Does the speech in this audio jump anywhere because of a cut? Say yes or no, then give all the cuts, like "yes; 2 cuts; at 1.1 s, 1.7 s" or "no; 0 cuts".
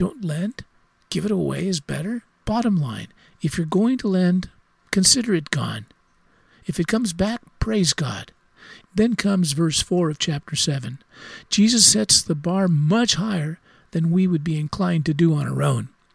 yes; 2 cuts; at 2.4 s, 8.8 s